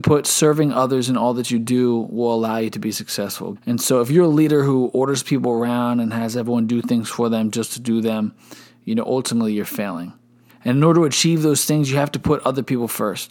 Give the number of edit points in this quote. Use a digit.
2